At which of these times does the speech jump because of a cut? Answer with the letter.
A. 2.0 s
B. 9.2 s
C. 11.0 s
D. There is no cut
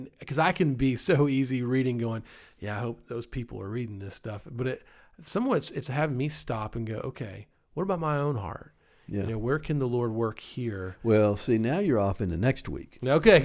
D